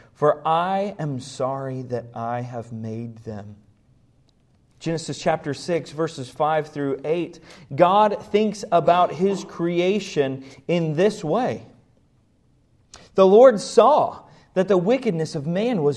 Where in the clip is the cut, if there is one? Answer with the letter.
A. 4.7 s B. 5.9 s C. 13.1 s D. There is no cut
A